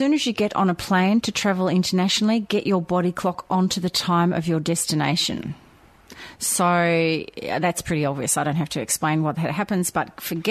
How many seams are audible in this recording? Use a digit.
0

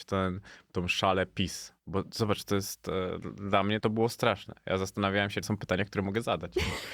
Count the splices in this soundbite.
3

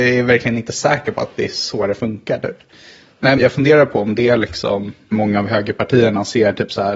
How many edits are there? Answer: 1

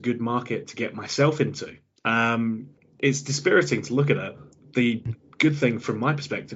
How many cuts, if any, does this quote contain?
1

